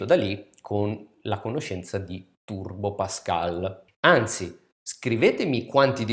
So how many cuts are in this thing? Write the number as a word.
one